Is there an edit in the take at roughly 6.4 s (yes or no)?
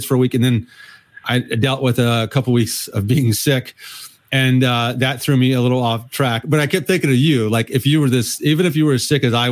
no